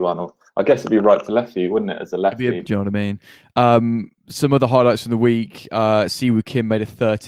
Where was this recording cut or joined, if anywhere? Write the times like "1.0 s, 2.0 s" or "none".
2.6 s